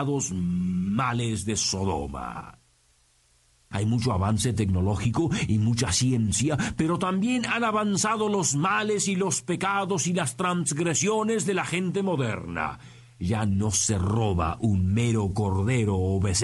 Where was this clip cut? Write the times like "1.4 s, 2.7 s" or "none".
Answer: 3.7 s